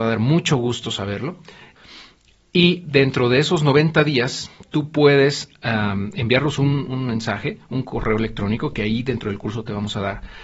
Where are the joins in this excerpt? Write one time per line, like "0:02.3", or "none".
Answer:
none